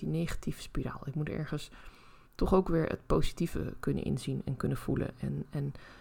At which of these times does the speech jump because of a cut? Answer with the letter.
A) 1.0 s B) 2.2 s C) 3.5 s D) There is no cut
B